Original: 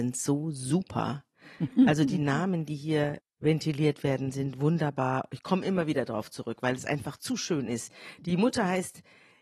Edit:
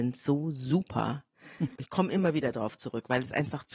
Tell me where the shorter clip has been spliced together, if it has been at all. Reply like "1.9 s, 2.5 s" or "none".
1.8 s

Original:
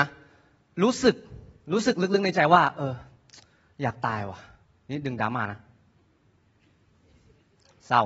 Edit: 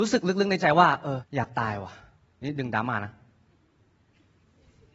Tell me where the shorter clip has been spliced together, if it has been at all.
1.2 s

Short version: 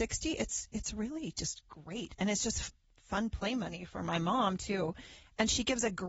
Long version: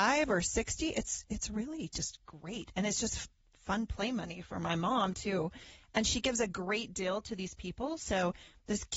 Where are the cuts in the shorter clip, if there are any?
none

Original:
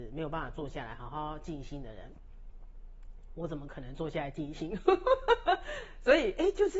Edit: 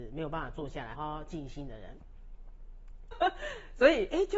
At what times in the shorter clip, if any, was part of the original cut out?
0.9 s, 3.1 s

